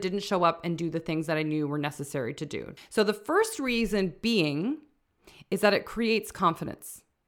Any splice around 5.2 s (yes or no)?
no